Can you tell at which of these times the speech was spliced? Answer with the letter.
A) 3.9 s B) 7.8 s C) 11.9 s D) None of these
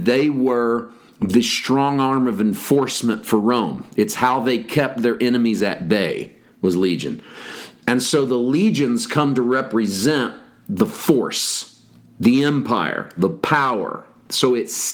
B